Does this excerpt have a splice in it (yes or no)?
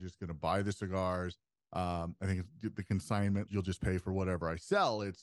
yes